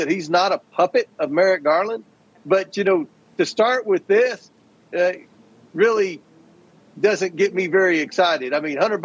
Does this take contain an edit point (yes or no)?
no